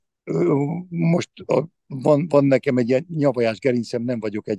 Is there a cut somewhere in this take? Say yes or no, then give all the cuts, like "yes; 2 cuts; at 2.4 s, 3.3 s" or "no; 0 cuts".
no; 0 cuts